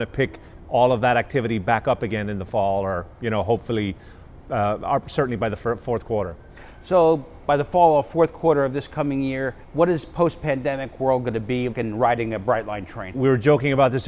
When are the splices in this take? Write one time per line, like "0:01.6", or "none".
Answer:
0:09.6
0:11.7
0:13.1